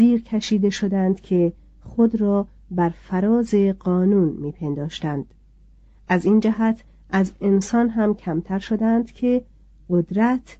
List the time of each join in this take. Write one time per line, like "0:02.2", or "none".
none